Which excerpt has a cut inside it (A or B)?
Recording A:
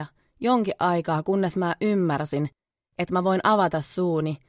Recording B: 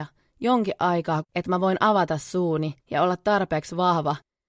B